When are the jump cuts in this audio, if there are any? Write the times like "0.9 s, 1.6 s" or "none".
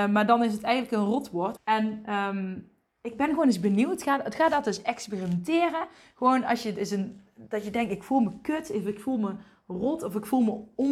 1.6 s